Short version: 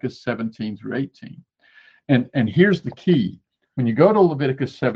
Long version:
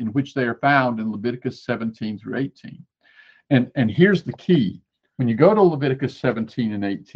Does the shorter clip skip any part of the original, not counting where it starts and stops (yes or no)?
no